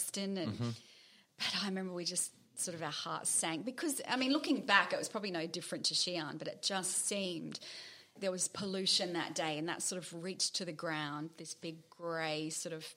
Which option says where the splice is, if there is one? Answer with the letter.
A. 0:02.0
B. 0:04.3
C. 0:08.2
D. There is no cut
C